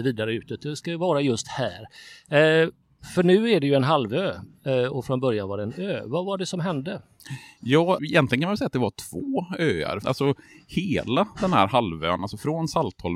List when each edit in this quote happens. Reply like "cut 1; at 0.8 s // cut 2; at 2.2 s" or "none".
cut 1; at 8.0 s // cut 2; at 10.0 s